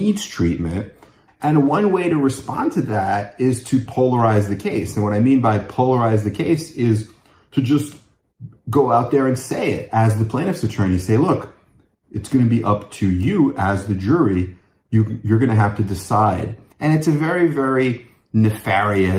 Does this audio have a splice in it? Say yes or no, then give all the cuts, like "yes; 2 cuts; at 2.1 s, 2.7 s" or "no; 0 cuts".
yes; 2 cuts; at 1.3 s, 16.7 s